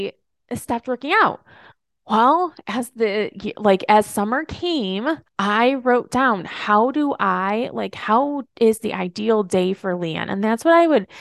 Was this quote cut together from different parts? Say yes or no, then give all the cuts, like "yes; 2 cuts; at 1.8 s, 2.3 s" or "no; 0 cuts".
no; 0 cuts